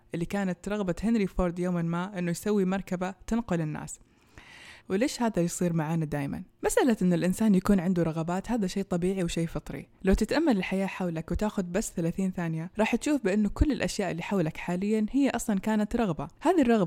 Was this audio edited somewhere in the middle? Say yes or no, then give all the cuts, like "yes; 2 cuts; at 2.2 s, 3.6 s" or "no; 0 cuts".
yes; 1 cut; at 4.8 s